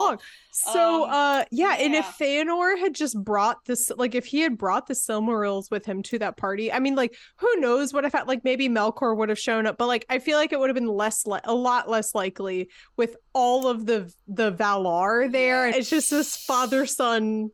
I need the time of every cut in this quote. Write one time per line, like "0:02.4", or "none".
0:15.7